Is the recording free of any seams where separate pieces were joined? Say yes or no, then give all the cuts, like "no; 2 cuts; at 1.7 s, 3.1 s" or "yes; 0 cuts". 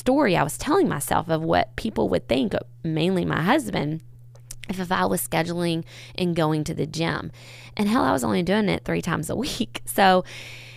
yes; 0 cuts